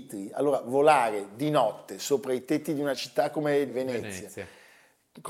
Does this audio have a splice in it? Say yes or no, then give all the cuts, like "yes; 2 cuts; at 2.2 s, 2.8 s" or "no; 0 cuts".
no; 0 cuts